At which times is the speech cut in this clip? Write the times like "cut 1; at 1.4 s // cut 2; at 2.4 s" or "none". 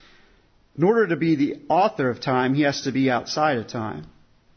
none